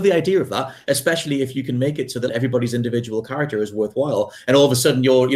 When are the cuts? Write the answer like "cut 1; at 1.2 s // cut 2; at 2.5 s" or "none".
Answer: cut 1; at 2.3 s